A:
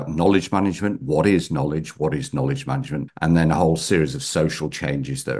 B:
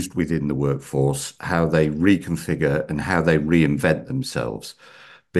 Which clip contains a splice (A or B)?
A